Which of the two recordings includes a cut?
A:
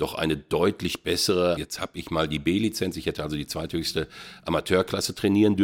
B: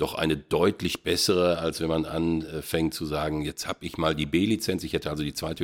A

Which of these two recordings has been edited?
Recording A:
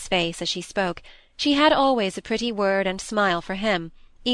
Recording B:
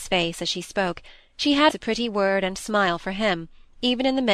B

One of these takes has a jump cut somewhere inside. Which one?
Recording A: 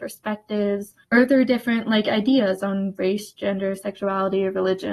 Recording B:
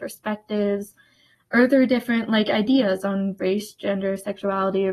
A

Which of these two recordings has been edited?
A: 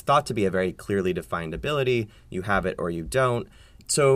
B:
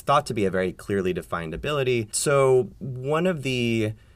B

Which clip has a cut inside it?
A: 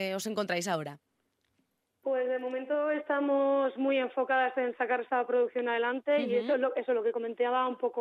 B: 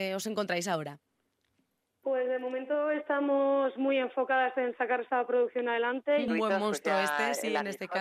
B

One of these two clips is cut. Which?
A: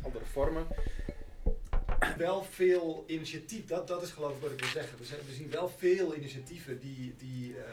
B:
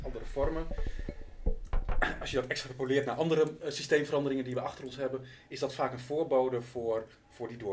A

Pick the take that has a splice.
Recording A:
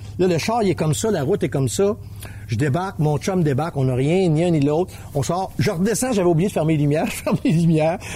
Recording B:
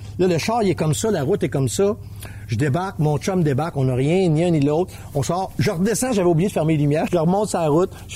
B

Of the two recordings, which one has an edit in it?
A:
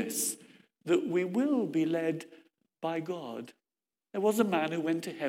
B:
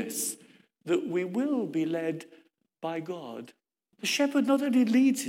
B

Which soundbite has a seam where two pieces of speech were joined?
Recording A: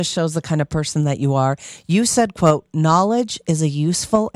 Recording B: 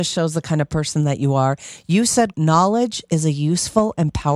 B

